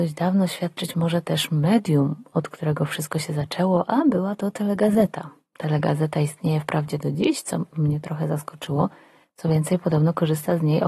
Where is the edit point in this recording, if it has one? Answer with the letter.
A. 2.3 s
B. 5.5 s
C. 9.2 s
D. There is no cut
D